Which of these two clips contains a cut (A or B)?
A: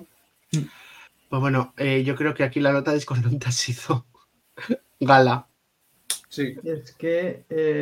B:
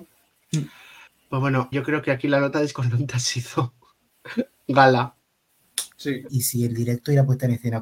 B